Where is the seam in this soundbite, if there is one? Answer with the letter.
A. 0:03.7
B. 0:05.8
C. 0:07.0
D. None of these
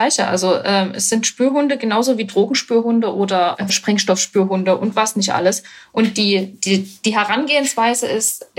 A